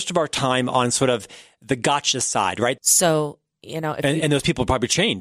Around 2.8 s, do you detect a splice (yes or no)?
yes